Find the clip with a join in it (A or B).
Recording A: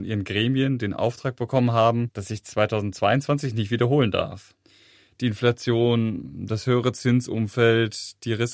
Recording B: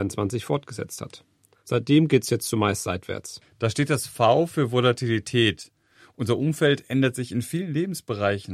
B